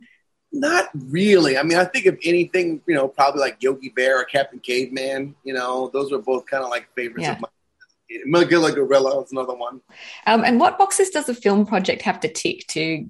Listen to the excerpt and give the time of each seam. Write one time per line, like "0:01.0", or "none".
none